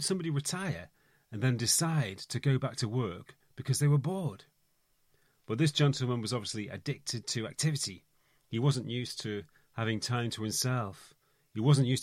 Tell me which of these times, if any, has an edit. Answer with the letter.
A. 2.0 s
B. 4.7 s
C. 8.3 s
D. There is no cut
D